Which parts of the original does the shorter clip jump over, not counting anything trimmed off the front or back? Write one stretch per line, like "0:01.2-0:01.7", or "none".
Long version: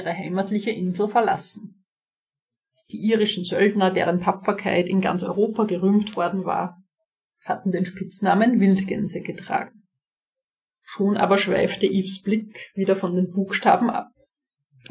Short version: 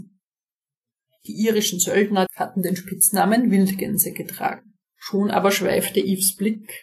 0:03.9-0:07.4
0:09.9-0:10.7